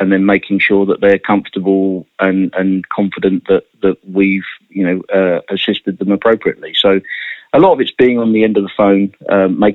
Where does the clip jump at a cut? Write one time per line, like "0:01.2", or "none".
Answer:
none